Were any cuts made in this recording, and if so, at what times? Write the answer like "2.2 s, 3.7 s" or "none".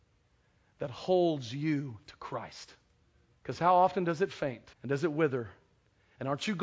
3.4 s, 4.7 s